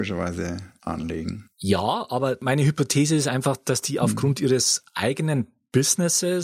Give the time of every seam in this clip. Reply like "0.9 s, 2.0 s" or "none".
none